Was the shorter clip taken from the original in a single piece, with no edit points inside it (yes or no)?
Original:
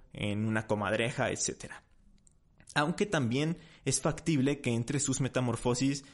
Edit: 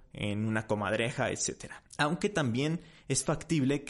no